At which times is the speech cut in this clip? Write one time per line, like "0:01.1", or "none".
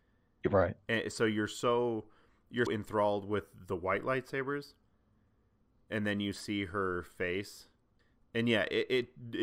0:02.7